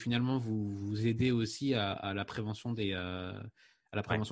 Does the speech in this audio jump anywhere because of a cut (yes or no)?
no